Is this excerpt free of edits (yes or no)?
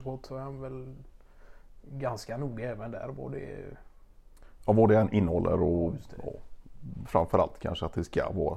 yes